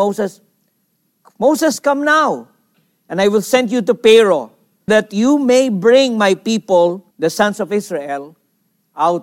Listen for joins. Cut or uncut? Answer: cut